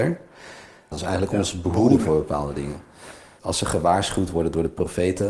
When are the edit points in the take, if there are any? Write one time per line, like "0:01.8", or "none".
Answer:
0:00.9
0:03.4

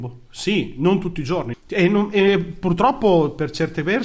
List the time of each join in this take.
0:01.5

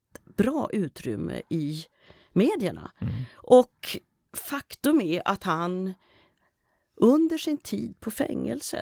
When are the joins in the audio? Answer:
none

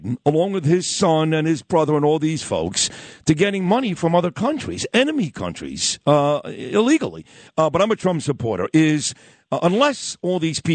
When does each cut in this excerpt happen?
0:07.5

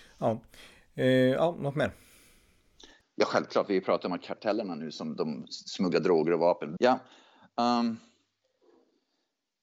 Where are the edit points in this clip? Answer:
0:03.0
0:06.8

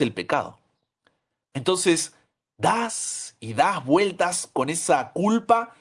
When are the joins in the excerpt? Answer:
0:01.4

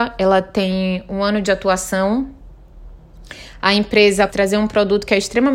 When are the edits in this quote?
0:04.3

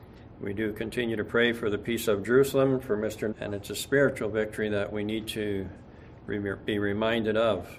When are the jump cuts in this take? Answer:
0:03.3

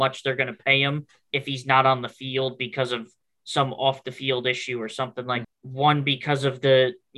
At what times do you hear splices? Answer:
0:05.4

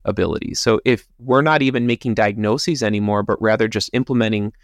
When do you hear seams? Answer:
none

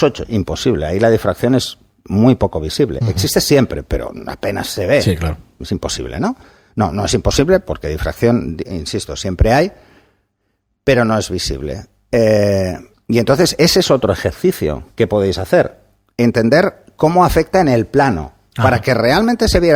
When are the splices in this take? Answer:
none

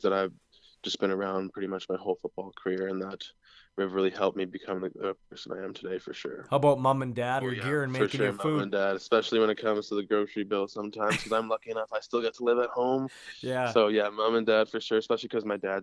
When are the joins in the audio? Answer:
0:07.4

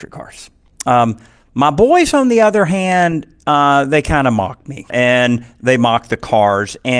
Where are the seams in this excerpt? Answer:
0:04.9

